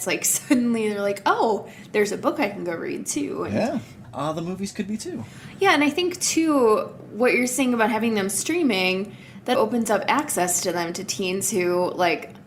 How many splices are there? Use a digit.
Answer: 2